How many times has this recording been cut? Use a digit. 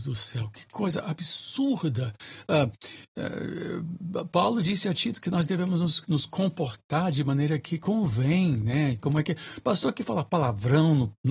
2